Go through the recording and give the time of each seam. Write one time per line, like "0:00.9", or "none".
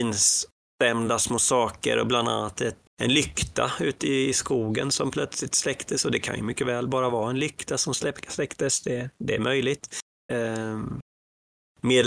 0:02.9
0:10.3